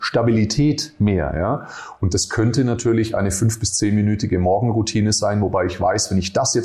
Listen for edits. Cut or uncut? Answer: uncut